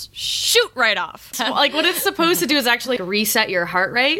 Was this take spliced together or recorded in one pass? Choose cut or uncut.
cut